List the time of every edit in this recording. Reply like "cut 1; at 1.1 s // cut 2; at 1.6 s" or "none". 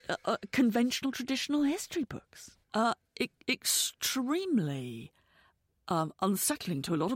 cut 1; at 2.6 s